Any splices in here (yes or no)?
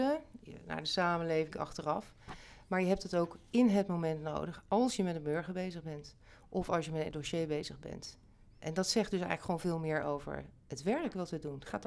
yes